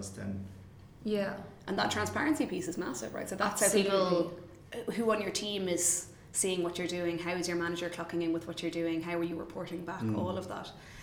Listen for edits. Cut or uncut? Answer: uncut